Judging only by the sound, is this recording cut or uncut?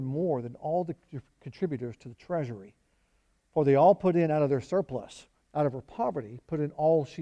cut